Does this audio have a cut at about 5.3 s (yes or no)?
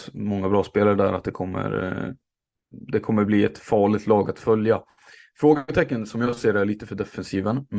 no